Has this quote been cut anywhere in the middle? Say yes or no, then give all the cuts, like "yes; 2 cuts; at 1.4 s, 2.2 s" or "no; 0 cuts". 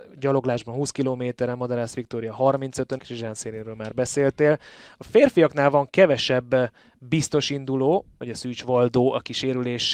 yes; 2 cuts; at 3.0 s, 8.2 s